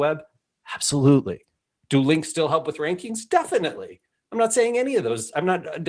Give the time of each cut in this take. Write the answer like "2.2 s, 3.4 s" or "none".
none